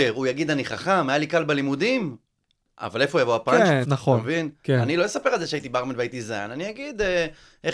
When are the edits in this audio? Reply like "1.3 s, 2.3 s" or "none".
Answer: 3.8 s